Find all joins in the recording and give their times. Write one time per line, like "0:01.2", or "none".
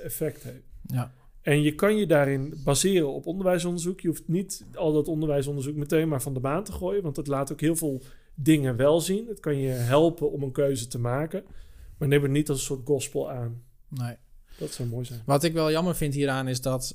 none